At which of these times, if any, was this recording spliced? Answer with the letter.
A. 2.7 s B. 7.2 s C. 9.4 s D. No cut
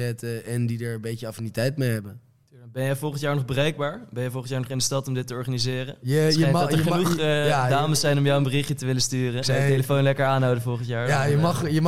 C